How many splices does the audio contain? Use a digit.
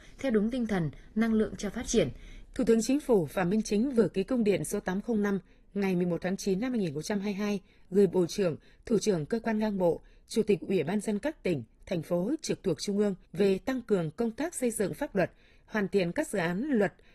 2